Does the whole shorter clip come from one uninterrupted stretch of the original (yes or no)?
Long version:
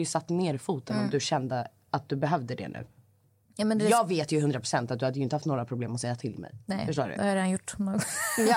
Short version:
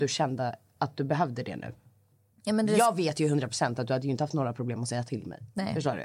yes